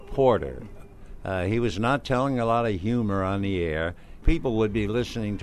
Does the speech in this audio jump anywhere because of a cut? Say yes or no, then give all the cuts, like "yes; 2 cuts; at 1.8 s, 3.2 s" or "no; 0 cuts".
yes; 1 cut; at 4.2 s